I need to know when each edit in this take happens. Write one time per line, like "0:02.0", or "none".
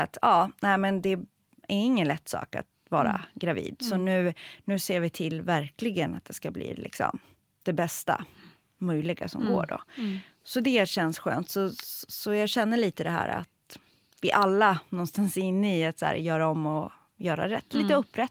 none

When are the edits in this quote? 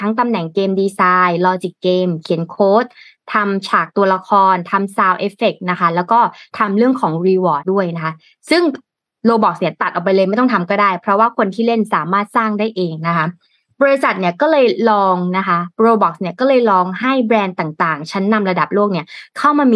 0:07.6

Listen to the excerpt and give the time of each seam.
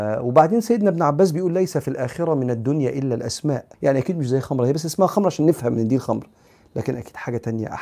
0:03.7

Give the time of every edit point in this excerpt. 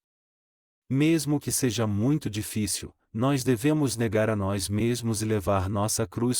none

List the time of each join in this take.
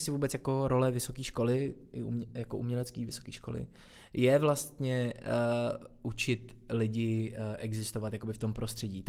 none

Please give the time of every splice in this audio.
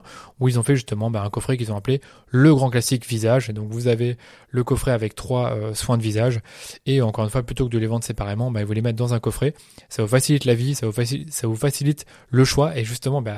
none

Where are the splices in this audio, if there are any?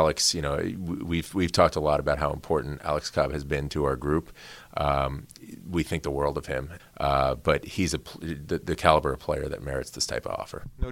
0:06.8

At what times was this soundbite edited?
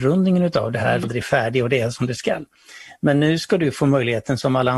0:01.0

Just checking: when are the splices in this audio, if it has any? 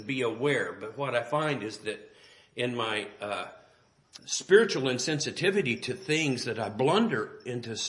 0:04.2

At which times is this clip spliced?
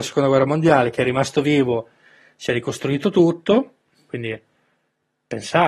0:04.1

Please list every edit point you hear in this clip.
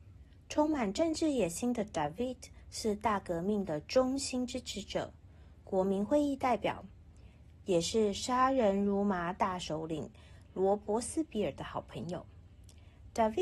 0:07.6

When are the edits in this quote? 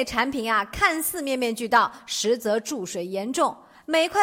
none

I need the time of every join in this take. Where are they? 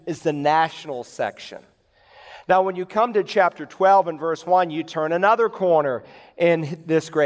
none

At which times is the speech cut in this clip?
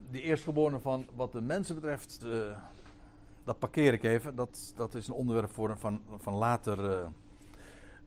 0:02.2

